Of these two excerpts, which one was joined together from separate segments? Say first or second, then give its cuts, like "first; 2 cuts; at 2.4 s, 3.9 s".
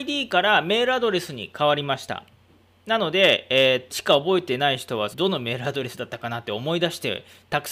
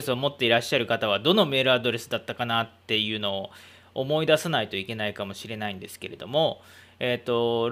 first; 2 cuts; at 3.9 s, 5.1 s